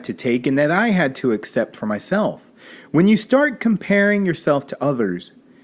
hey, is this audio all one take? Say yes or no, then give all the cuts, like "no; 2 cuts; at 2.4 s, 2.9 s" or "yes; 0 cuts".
yes; 0 cuts